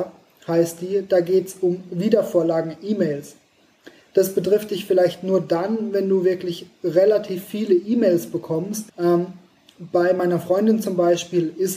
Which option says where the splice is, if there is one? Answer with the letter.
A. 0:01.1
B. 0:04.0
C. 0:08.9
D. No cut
C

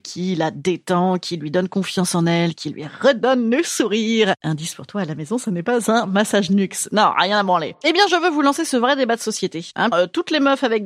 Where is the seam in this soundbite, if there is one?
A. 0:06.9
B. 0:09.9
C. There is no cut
B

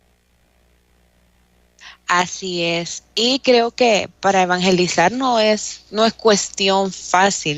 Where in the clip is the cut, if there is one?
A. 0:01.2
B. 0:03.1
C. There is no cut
C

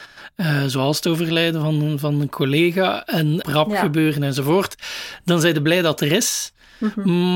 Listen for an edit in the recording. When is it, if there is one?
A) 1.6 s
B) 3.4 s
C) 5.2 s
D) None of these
B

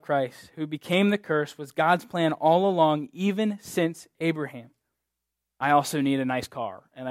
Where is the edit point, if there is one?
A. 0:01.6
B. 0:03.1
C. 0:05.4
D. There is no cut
C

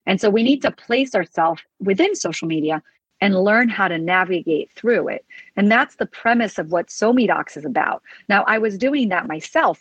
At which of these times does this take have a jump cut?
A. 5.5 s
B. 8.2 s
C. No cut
C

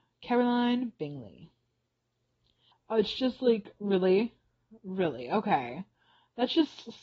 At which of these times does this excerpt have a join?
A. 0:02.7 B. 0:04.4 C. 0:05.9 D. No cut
A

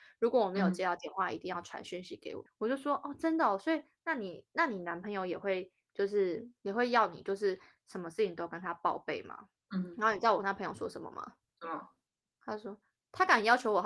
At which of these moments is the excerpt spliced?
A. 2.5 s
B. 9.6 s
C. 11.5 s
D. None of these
A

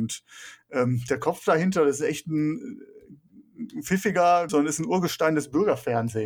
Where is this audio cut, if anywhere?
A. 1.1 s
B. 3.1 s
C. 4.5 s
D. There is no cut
C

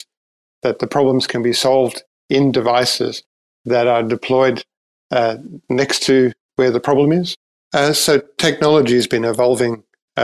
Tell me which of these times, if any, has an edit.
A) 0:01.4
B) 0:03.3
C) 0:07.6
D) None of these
C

